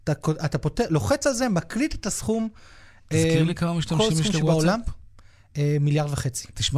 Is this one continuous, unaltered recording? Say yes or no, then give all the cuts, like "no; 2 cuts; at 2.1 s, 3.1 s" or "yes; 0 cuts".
yes; 0 cuts